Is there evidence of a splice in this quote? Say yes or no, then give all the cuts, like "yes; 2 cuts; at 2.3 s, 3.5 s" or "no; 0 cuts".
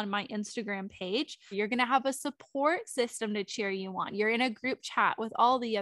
yes; 1 cut; at 1.5 s